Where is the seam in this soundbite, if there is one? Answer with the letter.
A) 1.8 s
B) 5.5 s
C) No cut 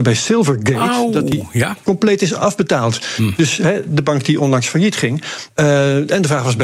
B